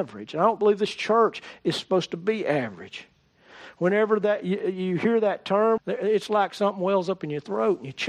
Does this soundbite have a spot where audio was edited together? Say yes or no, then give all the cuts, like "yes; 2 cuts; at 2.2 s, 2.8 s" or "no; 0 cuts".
yes; 1 cut; at 5.8 s